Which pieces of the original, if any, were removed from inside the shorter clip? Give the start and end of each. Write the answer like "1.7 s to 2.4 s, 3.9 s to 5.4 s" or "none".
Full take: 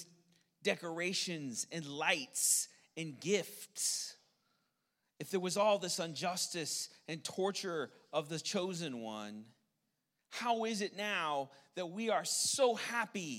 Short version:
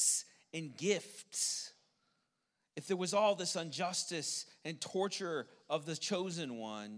none

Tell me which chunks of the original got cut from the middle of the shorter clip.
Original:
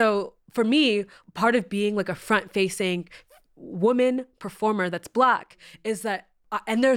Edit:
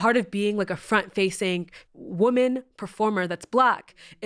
3.2 s to 3.5 s

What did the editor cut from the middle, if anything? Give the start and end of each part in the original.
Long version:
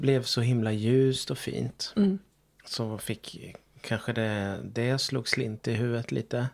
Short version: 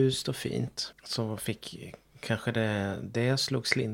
1.9 s to 2.5 s

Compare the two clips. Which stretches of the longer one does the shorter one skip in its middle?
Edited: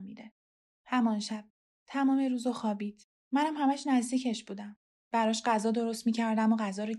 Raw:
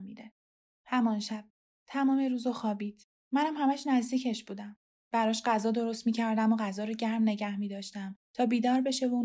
none

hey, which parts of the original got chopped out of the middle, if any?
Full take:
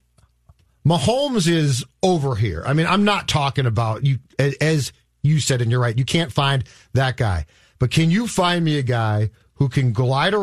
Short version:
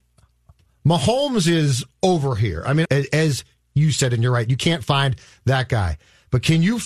2.8 s to 4.3 s

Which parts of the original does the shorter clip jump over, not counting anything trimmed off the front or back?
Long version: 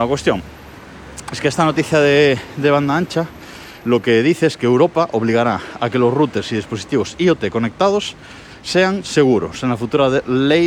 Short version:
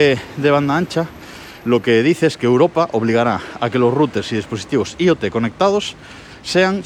none

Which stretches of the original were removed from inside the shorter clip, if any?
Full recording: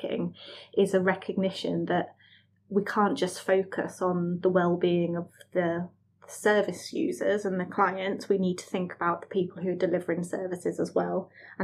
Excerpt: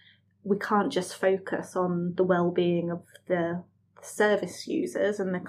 none

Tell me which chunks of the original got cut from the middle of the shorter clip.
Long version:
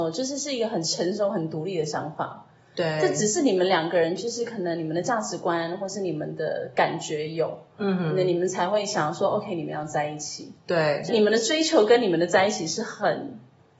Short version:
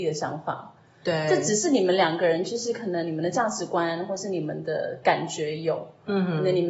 none

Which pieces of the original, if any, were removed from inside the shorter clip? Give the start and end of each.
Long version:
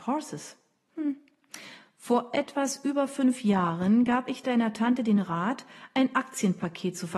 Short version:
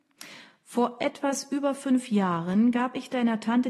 none

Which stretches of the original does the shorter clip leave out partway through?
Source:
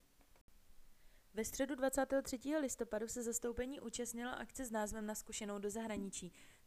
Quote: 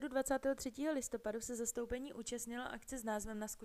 none

